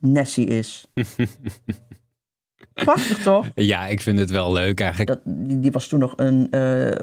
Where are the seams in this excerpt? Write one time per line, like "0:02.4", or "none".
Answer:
0:05.1